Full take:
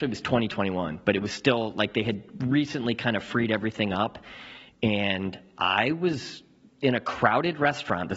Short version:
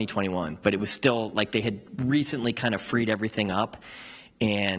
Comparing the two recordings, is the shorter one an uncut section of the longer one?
yes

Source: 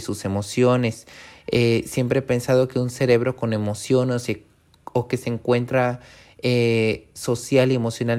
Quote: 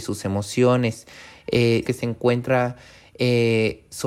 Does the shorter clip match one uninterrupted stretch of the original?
no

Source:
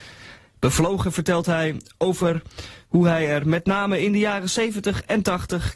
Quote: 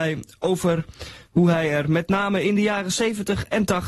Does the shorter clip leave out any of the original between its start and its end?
no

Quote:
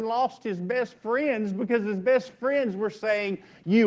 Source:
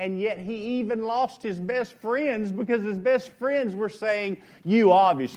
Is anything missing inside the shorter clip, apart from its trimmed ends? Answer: no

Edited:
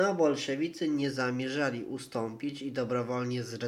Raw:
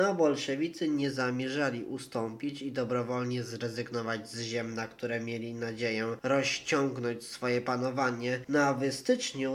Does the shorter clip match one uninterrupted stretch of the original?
yes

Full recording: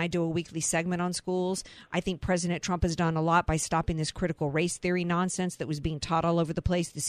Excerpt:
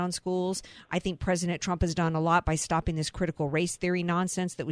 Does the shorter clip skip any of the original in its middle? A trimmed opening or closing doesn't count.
no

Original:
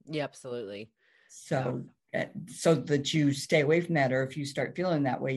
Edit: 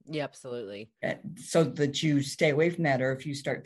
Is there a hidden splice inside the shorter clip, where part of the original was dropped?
yes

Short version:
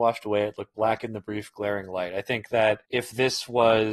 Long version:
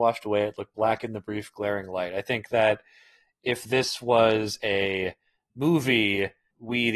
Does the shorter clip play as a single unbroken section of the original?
no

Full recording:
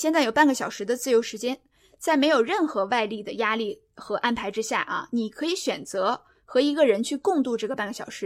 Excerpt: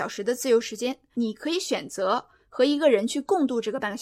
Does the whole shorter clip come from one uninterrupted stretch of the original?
no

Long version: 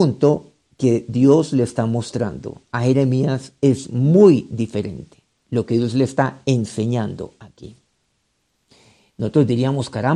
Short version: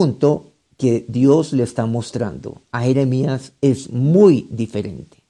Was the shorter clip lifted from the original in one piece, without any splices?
yes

